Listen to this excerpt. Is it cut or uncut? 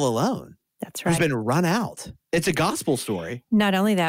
uncut